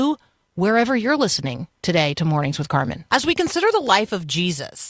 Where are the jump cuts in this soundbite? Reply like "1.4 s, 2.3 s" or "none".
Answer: 3.1 s